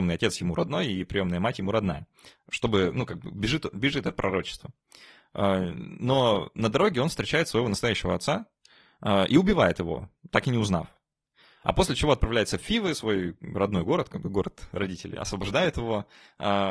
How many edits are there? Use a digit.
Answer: 0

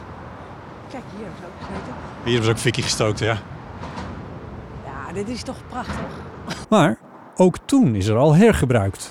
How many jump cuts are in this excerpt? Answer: 1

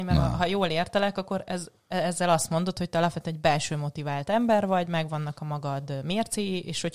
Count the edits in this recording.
0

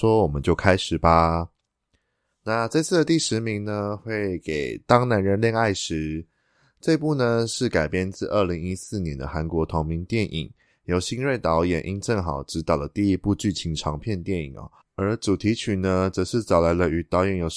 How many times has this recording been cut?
1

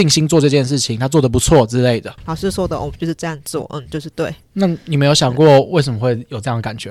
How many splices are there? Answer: 1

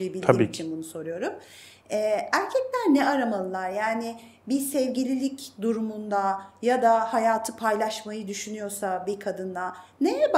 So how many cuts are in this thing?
0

